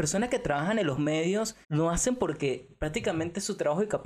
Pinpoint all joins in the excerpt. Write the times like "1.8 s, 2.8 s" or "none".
1.6 s